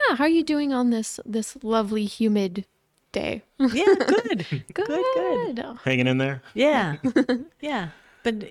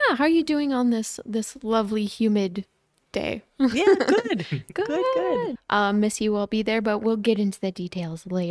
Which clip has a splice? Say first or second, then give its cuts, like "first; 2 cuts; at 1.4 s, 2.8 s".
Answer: second; 1 cut; at 5.6 s